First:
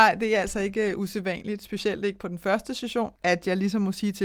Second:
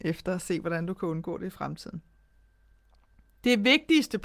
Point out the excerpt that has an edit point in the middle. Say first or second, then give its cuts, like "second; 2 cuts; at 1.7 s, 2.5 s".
first; 1 cut; at 3.2 s